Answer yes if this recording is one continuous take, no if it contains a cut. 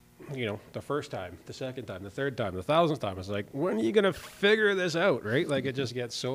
yes